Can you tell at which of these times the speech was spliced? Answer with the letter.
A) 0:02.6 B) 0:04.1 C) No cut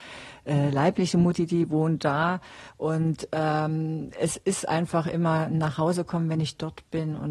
C